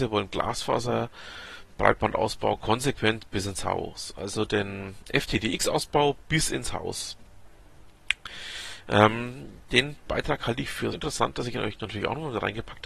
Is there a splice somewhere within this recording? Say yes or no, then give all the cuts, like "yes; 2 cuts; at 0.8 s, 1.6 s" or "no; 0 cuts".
yes; 1 cut; at 10.9 s